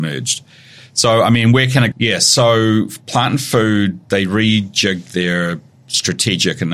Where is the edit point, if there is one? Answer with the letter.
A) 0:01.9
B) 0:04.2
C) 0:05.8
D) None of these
A